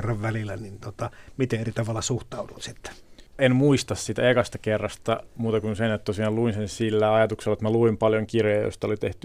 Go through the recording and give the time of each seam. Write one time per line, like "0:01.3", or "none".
0:03.4